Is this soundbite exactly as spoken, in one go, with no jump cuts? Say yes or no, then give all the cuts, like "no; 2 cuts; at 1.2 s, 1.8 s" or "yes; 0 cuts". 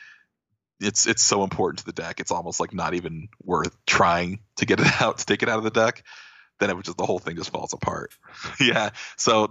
no; 1 cut; at 8.1 s